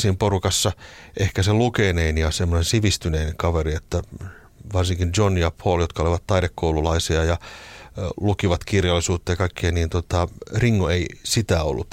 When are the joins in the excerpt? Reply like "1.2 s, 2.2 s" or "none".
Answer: none